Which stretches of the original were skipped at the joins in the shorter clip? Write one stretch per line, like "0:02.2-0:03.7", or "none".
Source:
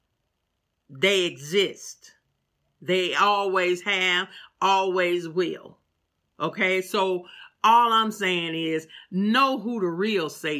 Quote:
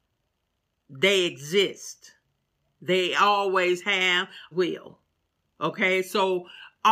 0:04.5-0:05.3